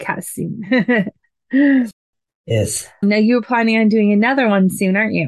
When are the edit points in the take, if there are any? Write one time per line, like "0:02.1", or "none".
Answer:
0:03.0